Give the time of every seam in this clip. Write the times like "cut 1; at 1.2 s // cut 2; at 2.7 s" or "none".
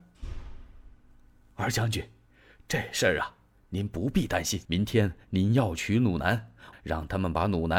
cut 1; at 4.6 s // cut 2; at 6.7 s